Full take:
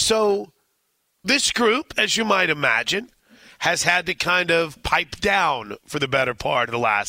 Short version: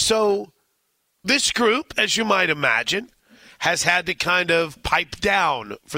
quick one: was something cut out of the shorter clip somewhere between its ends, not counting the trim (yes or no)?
no